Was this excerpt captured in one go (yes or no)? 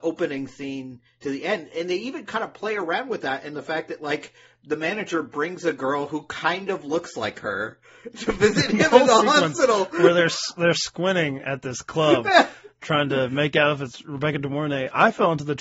yes